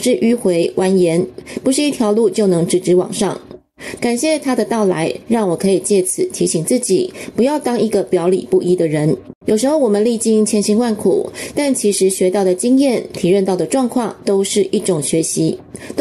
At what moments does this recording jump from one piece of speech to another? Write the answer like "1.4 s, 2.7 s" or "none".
4.0 s, 9.4 s, 11.5 s